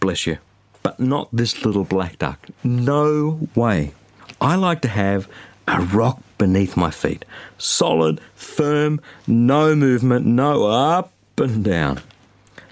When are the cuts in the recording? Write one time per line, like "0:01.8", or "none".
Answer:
none